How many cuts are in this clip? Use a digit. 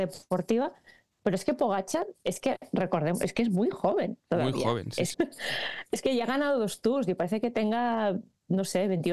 1